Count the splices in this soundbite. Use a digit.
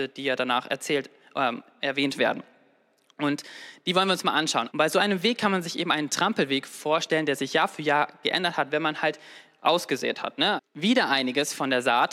2